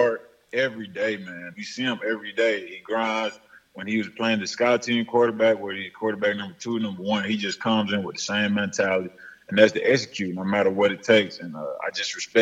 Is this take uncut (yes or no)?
no